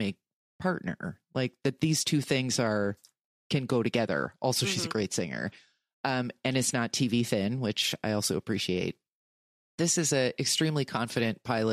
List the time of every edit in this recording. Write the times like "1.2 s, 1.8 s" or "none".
none